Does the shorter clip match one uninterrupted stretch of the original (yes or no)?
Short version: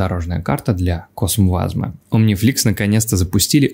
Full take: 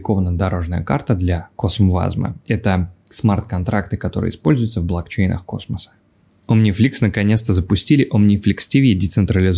no